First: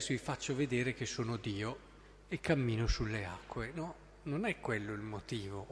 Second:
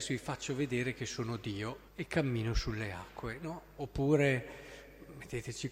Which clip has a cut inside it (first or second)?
second